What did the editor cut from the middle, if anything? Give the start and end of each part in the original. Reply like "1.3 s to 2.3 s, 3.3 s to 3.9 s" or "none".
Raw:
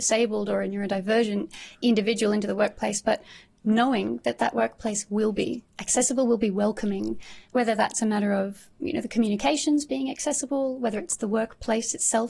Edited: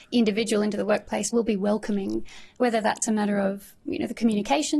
3.0 s to 6.3 s